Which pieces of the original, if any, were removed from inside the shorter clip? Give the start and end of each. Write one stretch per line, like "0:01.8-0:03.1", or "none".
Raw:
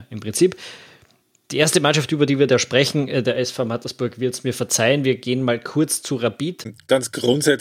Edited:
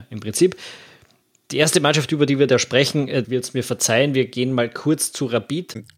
0:03.2-0:04.1